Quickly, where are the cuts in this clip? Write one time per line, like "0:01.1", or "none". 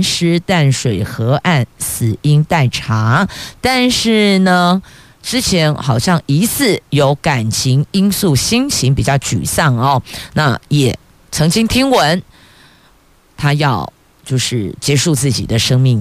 none

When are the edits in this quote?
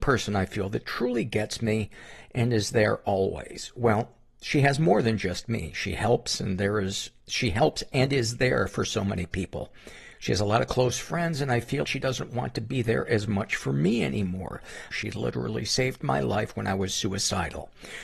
0:07.2
0:11.8
0:14.9

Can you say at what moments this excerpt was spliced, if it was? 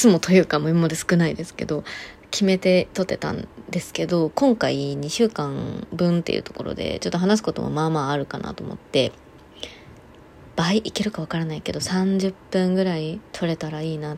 0:13.3

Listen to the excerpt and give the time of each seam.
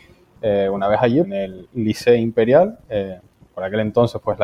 0:01.2

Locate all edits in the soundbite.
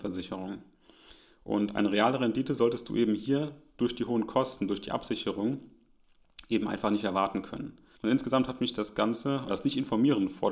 0:08.0
0:09.5

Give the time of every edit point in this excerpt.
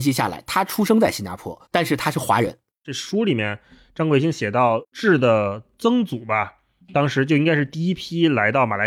0:01.6

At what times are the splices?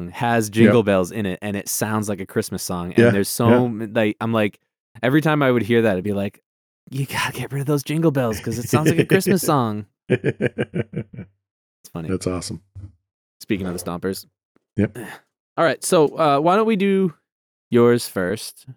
none

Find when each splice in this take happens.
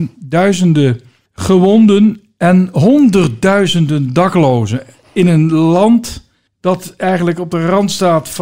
none

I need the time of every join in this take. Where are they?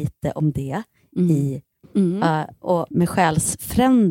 0:01.8
0:02.9

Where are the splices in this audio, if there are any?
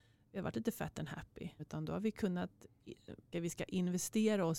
0:01.6
0:03.3

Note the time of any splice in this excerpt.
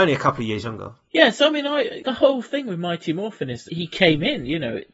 0:03.7

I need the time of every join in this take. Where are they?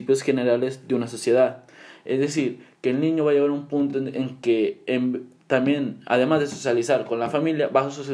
none

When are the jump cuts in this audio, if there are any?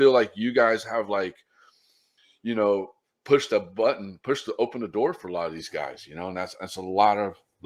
none

